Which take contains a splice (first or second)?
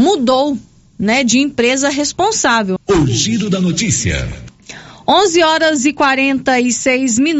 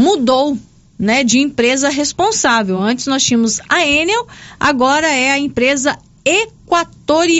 first